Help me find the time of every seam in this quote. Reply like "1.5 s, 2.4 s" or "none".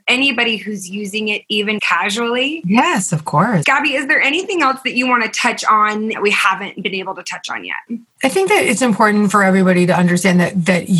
1.8 s, 3.6 s, 8.8 s